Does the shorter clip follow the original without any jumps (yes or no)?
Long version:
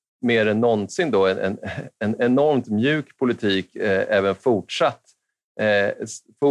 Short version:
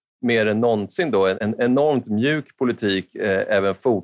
no